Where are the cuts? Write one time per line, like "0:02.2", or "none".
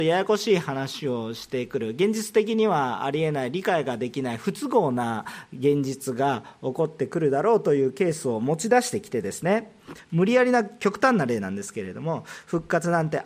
none